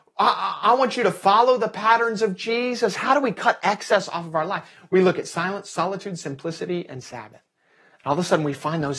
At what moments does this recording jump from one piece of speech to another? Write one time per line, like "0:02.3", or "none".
none